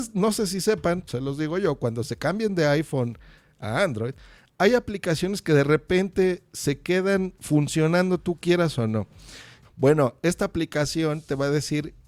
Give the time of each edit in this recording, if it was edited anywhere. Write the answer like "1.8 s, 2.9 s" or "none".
1.1 s, 9.6 s